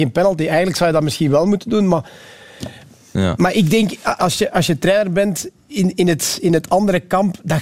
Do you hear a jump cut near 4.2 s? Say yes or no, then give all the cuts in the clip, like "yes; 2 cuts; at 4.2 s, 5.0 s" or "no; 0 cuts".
yes; 1 cut; at 4.2 s